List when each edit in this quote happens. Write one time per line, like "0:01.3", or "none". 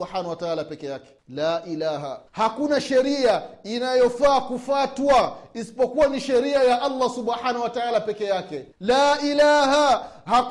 0:01.2
0:02.3
0:08.7